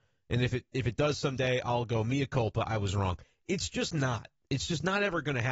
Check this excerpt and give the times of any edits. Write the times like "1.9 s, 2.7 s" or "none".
none